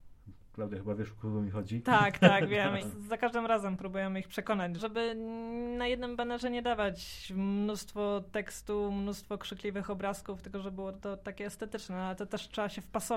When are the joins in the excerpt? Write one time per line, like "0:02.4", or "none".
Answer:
0:02.8
0:04.8